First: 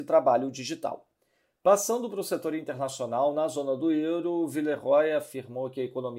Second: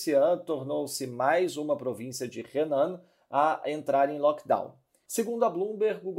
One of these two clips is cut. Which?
second; 1 cut; at 5.1 s

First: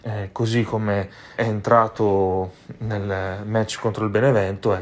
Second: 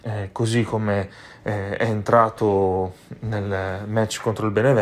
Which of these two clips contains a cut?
first; 1 cut; at 1.4 s

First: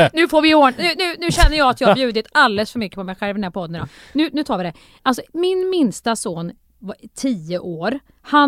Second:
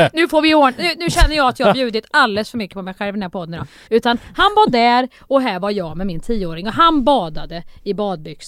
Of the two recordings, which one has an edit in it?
second; 2 cuts; at 1.0 s, 3.9 s

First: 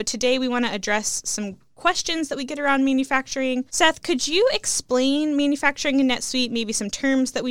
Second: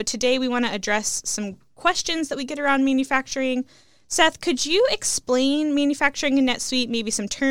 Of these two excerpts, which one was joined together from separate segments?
first; 1 cut; at 3.7 s

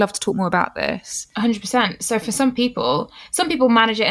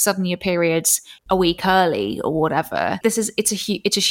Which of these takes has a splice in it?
second; 2 cuts; at 1.2 s, 3.0 s

